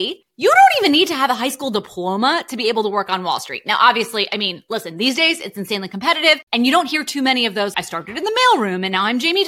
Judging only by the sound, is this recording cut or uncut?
cut